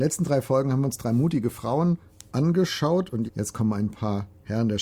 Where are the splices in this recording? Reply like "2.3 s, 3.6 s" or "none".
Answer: 3.3 s